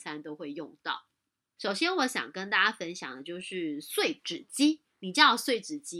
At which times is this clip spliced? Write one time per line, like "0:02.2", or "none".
0:01.6